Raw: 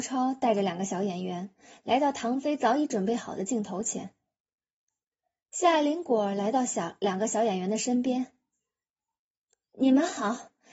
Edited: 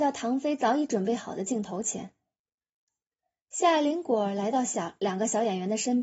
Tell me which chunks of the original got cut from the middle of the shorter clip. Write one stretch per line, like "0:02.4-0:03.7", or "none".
none